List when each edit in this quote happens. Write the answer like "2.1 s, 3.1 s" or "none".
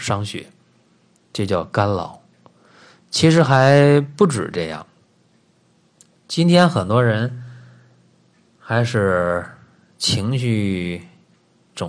none